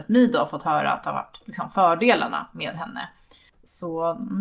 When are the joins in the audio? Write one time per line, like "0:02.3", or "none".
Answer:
0:03.5